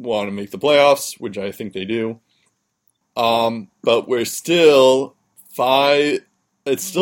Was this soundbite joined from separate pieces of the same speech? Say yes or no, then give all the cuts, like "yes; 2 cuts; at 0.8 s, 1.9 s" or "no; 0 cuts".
yes; 1 cut; at 3.0 s